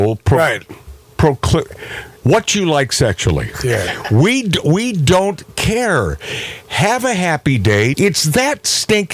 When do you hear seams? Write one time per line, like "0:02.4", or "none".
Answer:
0:02.2
0:07.9